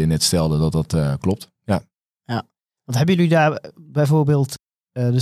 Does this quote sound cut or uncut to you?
uncut